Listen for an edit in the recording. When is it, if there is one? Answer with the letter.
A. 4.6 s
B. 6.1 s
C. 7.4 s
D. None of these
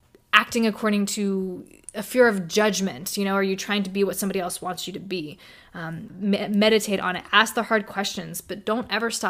B